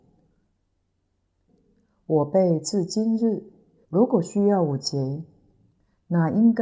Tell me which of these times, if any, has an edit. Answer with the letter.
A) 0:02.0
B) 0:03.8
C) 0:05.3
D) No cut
B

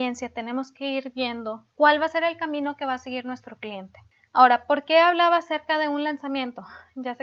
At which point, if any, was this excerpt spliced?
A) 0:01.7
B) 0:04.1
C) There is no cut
A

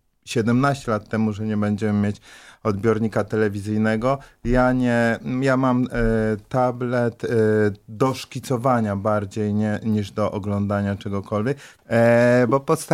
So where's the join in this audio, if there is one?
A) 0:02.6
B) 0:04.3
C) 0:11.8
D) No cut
C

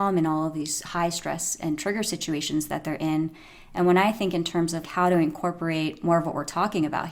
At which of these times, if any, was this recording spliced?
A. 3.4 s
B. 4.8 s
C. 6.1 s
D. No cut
B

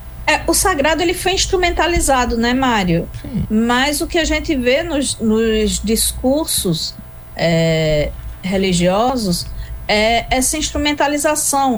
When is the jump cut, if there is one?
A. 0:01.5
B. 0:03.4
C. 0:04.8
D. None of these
B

